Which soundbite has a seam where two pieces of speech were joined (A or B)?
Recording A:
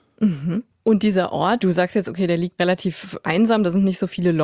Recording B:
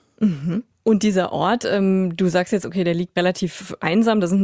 A